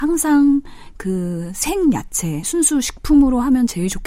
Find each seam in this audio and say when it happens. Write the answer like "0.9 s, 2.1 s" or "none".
2.4 s